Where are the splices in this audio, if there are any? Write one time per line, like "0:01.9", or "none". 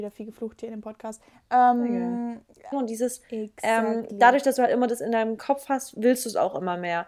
0:02.7